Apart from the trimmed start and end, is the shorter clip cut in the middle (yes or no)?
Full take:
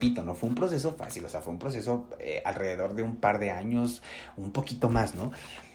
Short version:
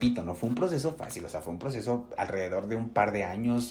yes